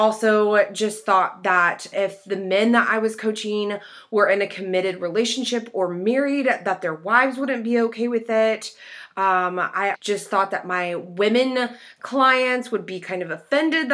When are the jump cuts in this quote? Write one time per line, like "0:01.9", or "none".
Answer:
0:01.9
0:09.9